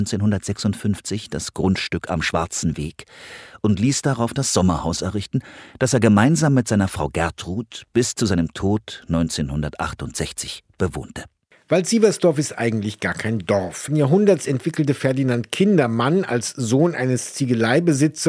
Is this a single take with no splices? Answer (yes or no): no